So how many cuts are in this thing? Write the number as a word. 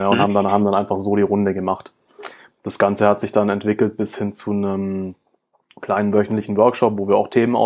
zero